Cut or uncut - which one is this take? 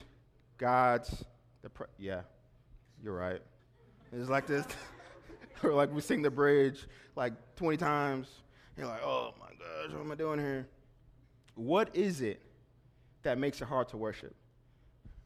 cut